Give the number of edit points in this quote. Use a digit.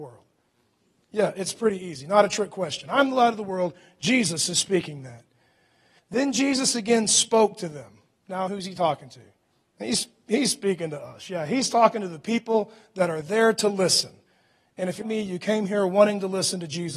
3